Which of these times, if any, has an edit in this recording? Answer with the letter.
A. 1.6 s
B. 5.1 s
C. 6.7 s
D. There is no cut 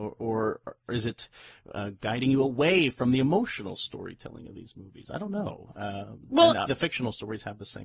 C